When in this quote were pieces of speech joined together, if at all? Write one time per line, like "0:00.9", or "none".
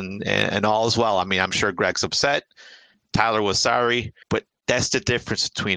0:04.2